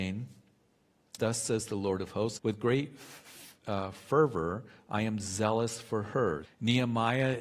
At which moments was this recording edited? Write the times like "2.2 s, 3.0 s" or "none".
1.2 s, 2.4 s, 6.4 s